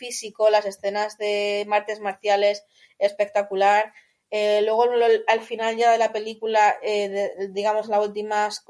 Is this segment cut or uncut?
uncut